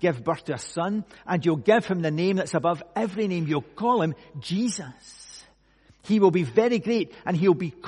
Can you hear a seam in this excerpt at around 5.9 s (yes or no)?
no